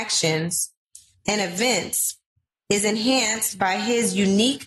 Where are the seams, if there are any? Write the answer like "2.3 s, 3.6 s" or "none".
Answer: 1.1 s

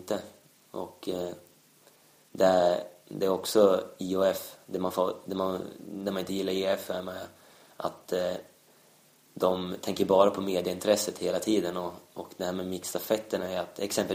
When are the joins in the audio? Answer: none

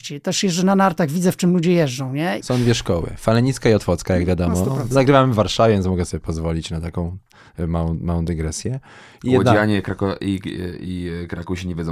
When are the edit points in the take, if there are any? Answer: 2.4 s

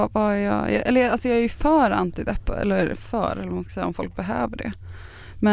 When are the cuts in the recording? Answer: none

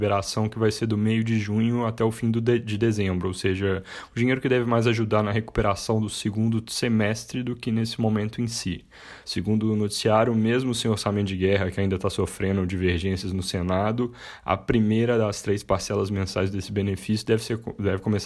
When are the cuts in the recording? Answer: 9.2 s

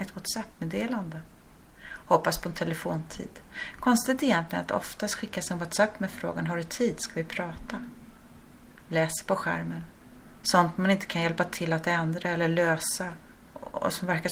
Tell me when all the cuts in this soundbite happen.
10.4 s

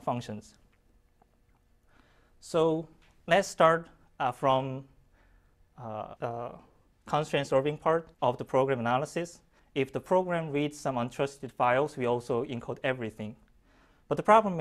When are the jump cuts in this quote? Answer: 6.2 s, 8.1 s, 9.6 s

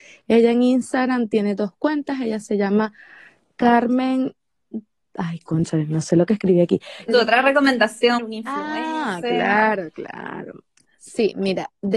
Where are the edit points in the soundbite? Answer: 7.1 s, 8.2 s, 10.8 s

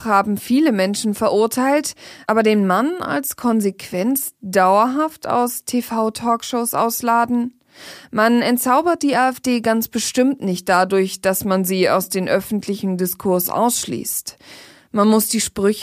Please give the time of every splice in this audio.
none

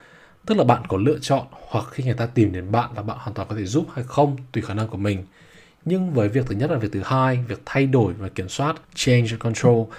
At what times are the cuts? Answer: 8.8 s

